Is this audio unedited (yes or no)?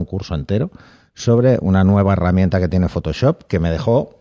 yes